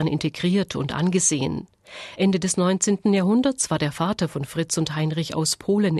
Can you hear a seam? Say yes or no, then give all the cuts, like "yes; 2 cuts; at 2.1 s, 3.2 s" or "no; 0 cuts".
no; 0 cuts